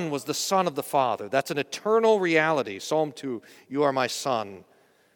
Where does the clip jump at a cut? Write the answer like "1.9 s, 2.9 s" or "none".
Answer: none

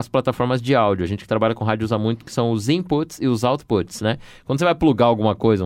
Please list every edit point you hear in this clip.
none

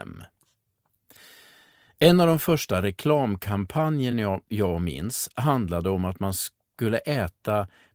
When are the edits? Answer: none

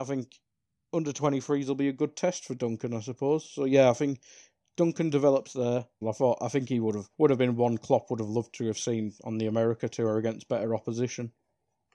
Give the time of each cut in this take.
6.0 s, 7.1 s

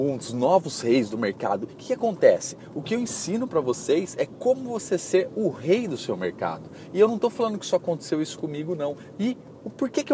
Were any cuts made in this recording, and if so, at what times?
1.7 s, 9.2 s

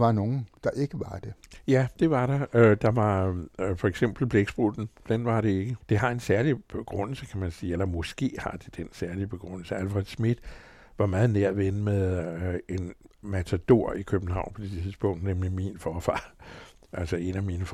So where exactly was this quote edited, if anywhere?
5.8 s

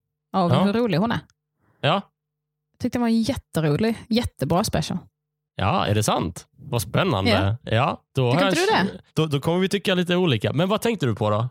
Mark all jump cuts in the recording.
none

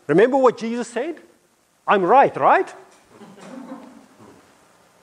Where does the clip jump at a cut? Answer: none

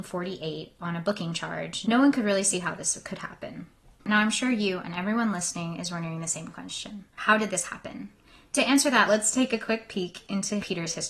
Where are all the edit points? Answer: 4.0 s, 7.1 s

